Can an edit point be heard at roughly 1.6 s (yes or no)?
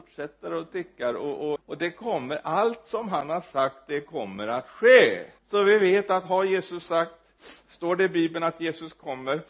yes